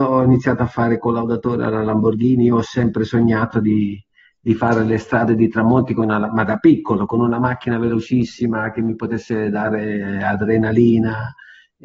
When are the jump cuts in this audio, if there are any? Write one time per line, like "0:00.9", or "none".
none

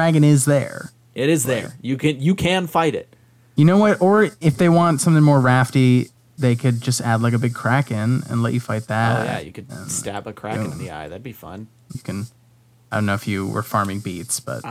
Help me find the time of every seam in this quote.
0:11.9

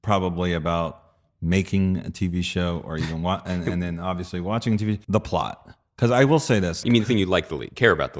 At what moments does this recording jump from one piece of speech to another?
0:05.0
0:06.8

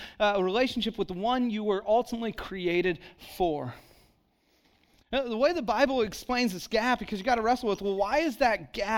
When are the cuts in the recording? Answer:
none

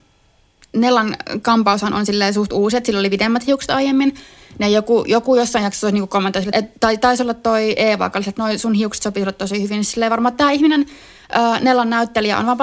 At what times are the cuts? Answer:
0:06.5

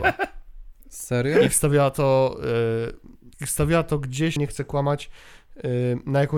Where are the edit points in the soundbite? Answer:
0:03.3
0:04.4

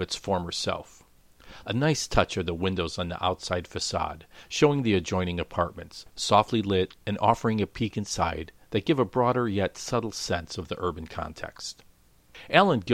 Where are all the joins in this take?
0:01.6

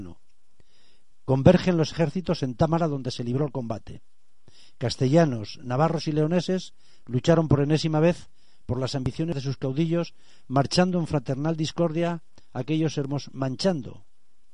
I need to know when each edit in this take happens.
none

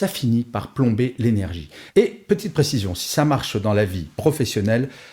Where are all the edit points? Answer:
0:01.9

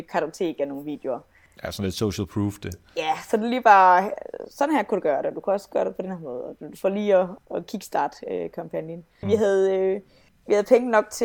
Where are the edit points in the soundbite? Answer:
0:07.4
0:09.2

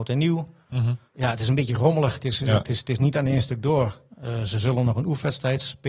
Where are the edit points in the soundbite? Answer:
0:01.1

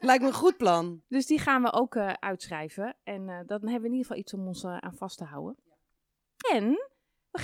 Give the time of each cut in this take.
0:01.0
0:06.4

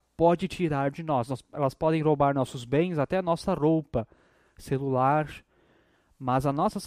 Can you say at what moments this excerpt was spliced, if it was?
none

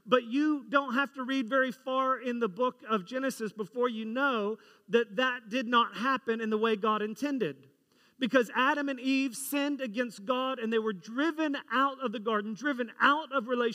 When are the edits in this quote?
none

